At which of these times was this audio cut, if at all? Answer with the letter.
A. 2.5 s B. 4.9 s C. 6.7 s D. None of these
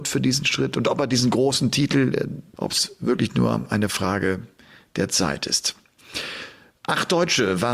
A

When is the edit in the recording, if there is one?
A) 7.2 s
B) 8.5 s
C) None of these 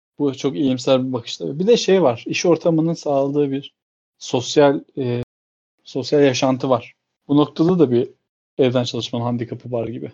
A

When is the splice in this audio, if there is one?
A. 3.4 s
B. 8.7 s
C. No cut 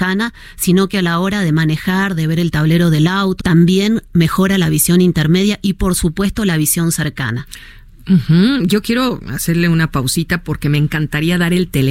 A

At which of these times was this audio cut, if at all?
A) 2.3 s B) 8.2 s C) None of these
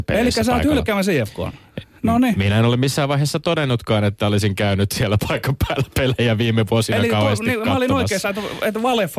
C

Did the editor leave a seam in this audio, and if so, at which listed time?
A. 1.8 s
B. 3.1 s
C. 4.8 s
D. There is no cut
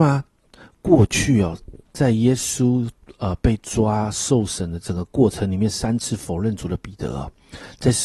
A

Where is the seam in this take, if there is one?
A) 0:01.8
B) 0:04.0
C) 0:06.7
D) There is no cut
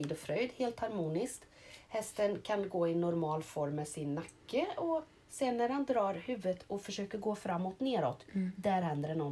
D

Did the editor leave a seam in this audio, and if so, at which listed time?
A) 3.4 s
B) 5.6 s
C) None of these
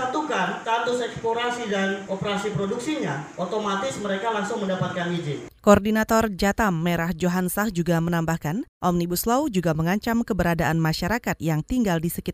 A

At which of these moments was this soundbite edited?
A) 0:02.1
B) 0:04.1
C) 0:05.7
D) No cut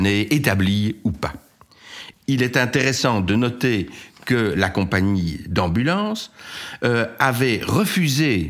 A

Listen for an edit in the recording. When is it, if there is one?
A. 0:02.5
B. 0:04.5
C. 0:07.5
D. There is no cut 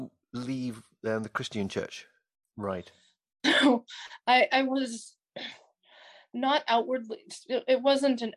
A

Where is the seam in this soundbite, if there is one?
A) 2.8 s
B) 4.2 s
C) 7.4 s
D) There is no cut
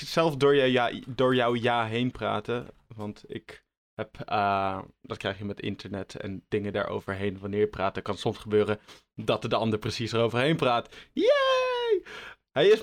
D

